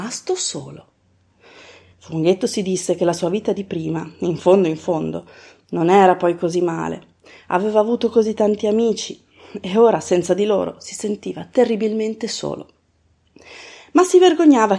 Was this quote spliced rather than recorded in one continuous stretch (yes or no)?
yes